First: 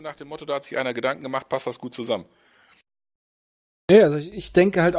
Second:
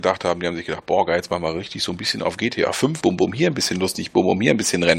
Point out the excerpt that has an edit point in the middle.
second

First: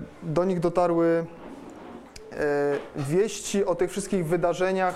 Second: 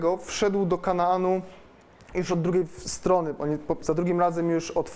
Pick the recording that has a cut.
second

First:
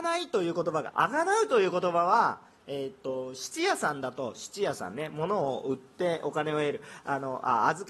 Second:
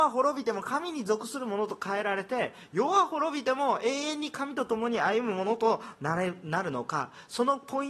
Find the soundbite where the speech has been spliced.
first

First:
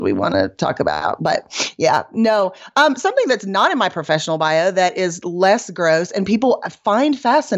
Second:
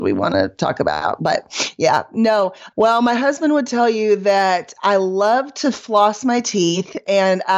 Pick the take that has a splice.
second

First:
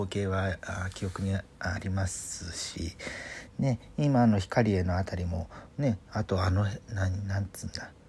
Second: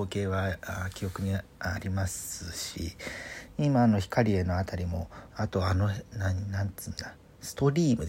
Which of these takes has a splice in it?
second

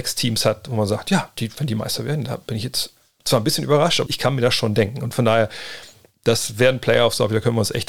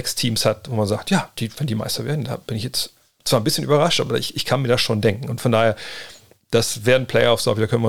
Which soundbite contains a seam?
first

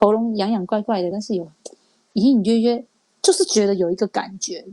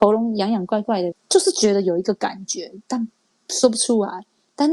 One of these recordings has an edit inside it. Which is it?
second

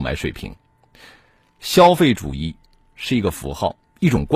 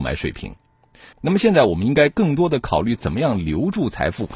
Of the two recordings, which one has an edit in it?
second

